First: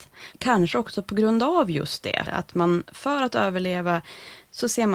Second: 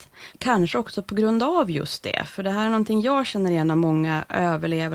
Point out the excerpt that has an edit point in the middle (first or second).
first